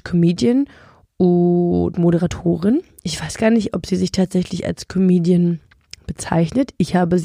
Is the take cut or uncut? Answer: uncut